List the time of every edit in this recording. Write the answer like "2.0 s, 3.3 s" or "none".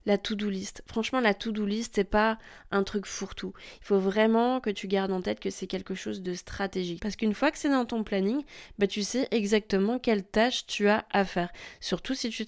7.0 s